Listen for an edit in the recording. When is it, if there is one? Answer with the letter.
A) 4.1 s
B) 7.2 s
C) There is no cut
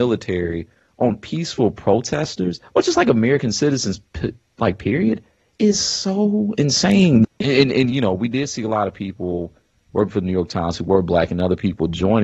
B